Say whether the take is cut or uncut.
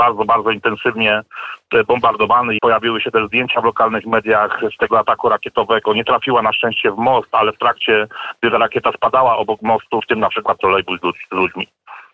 cut